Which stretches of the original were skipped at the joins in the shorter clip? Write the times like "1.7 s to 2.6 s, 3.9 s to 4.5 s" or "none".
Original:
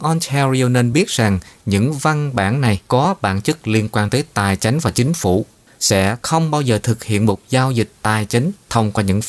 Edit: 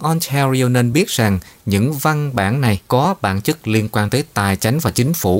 none